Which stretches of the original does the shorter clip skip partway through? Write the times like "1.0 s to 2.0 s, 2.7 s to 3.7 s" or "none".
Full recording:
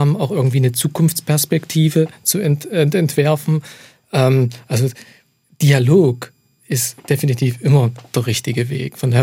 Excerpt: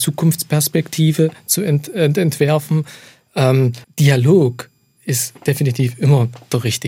4.6 s to 5.5 s

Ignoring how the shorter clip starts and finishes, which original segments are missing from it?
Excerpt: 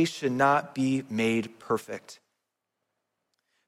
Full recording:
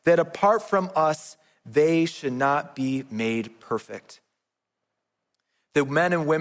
none

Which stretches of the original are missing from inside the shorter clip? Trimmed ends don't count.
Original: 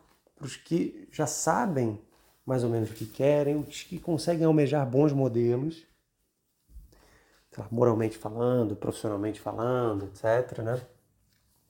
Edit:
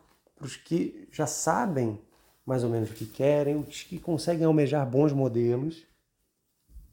none

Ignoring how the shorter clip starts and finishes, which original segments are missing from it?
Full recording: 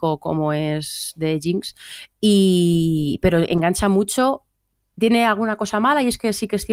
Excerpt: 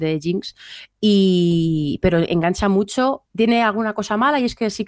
4.5 s to 4.9 s

